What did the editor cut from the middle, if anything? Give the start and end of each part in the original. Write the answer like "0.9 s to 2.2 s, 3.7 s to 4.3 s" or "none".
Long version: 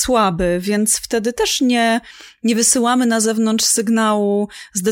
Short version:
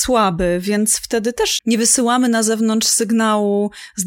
1.6 s to 2.4 s

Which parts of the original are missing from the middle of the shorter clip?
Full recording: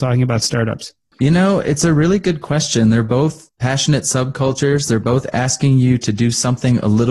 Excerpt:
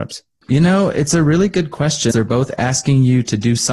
2.8 s to 4.9 s

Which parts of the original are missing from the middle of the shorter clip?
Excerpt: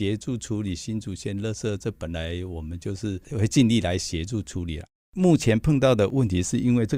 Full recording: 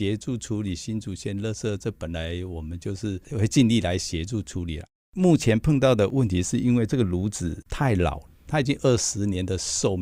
none

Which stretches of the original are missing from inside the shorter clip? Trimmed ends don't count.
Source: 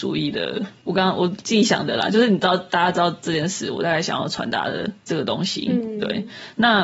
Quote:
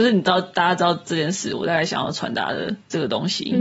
none

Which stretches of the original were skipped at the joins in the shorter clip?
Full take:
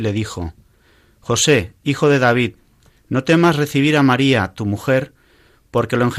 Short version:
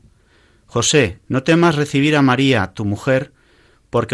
1.8 s to 3.0 s

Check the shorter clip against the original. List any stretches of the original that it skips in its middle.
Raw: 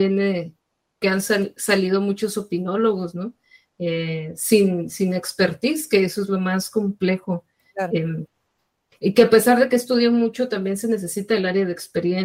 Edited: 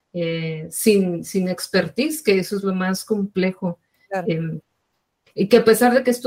none

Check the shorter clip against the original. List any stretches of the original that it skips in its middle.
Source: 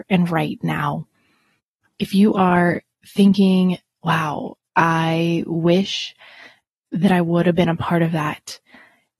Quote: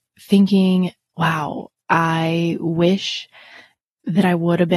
none

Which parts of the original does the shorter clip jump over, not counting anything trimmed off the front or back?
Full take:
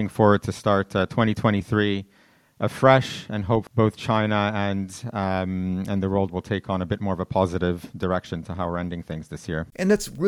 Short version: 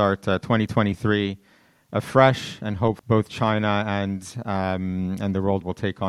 none

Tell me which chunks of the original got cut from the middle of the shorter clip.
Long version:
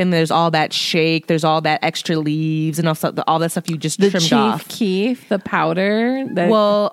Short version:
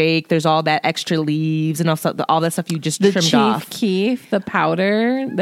none

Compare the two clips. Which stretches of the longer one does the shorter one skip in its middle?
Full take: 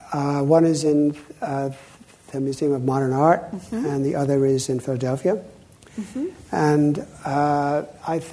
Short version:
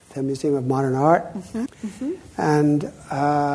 3.8 s to 5.8 s

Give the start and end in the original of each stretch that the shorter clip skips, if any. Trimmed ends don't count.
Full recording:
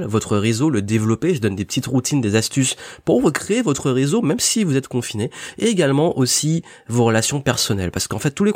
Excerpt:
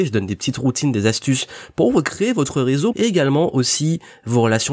4.2 s to 5.5 s

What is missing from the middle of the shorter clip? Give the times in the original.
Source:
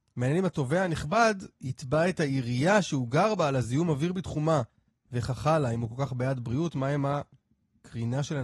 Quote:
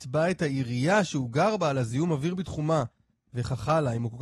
none

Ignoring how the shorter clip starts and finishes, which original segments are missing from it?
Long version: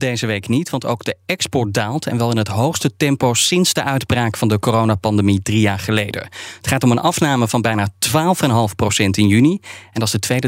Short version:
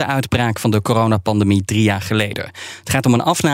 none

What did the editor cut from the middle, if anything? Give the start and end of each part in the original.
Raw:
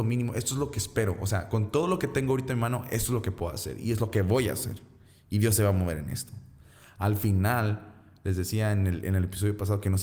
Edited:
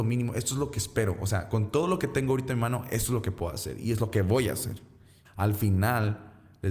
5.2 s to 6.9 s

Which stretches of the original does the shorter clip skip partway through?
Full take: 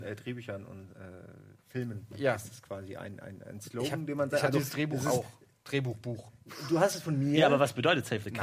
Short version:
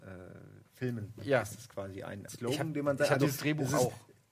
3.2 s to 3.6 s

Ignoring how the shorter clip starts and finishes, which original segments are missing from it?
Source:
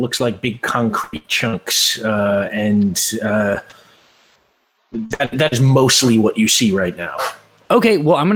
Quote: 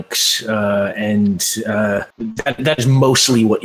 3.7 s to 4.8 s

